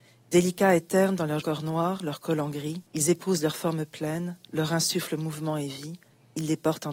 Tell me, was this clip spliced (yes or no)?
yes